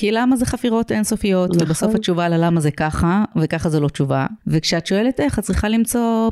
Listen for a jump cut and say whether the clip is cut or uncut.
cut